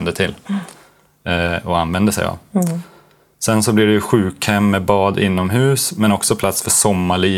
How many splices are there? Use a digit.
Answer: 0